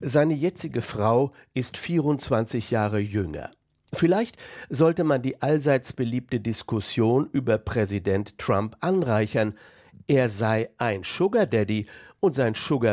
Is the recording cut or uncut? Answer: uncut